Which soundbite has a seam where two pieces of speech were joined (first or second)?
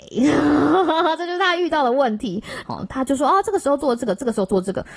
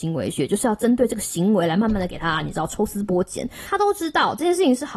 first